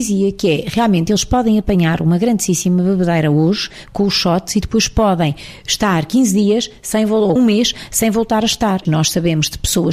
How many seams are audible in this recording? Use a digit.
2